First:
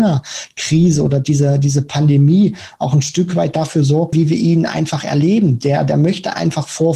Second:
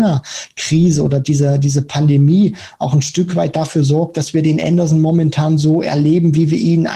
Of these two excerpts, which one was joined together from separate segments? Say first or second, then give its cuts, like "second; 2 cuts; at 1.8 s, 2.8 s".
first; 1 cut; at 4.1 s